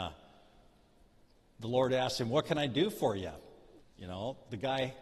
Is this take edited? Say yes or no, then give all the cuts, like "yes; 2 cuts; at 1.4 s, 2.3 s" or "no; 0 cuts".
yes; 1 cut; at 3.8 s